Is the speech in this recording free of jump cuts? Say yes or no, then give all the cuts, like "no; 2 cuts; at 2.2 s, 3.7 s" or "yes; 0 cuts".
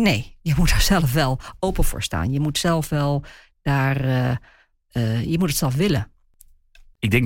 yes; 0 cuts